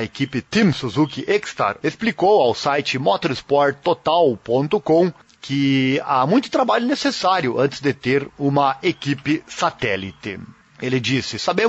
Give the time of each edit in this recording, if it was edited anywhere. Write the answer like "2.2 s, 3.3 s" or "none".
1.8 s